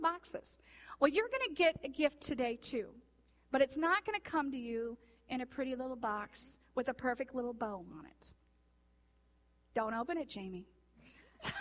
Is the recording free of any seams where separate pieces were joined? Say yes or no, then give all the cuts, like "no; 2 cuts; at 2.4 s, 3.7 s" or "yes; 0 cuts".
yes; 0 cuts